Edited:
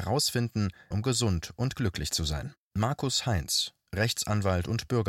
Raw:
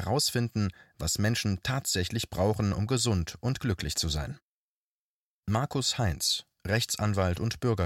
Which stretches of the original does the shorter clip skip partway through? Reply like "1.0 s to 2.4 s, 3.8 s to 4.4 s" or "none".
0.9 s to 2.8 s, 4.5 s to 5.4 s